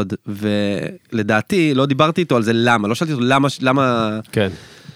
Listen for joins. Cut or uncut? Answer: uncut